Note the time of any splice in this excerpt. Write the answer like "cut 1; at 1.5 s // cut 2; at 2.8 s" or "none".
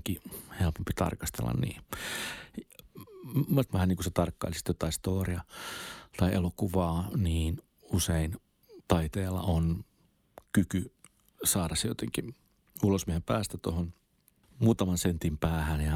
cut 1; at 3.7 s